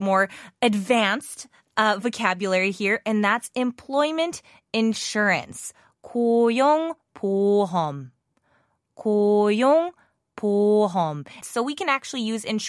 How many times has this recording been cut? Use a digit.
1